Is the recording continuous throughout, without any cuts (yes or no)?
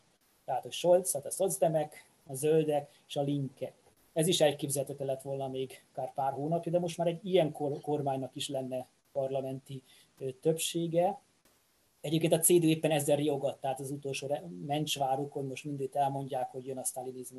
yes